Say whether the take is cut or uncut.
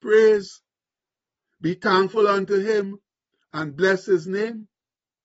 uncut